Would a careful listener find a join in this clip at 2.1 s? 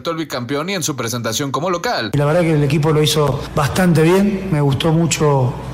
yes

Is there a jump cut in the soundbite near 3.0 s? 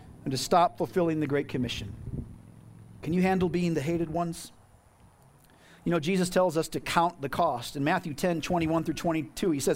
yes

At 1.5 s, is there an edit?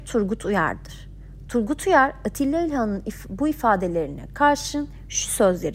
no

